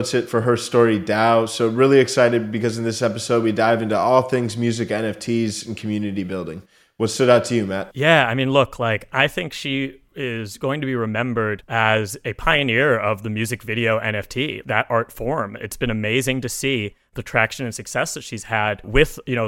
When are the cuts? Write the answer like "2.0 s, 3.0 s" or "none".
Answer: 14.6 s